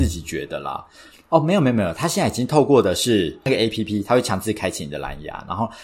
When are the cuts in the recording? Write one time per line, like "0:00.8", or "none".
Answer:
0:01.3
0:04.1